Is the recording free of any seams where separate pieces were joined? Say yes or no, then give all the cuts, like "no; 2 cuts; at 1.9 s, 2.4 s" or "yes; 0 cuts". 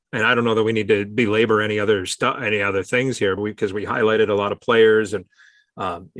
no; 1 cut; at 3.4 s